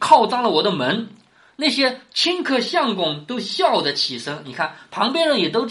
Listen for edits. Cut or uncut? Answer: uncut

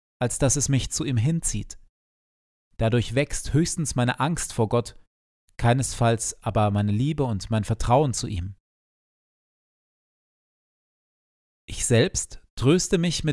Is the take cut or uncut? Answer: cut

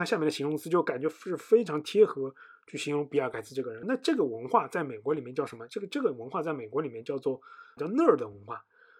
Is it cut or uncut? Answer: cut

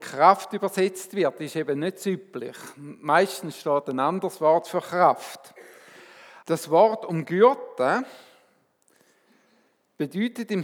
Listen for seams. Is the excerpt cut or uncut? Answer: cut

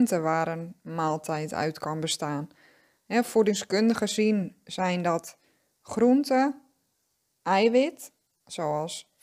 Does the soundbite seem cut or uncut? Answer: uncut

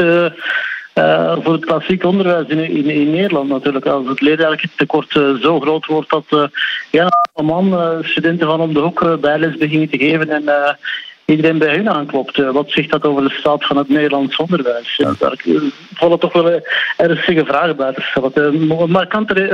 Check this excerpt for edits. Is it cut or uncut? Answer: uncut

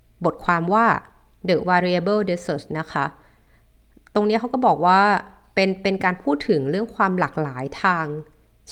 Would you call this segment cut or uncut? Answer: uncut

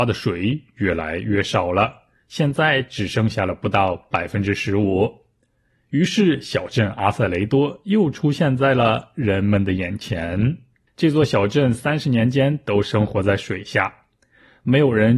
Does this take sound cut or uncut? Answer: cut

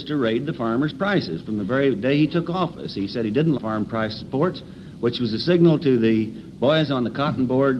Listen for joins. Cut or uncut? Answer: cut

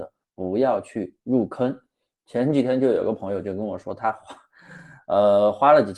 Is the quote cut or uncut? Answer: uncut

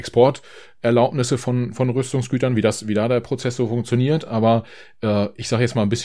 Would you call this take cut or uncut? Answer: uncut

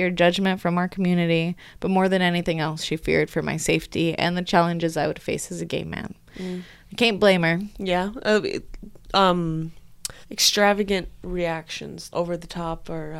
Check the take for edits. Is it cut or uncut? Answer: cut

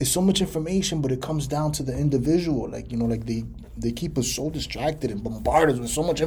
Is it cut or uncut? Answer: uncut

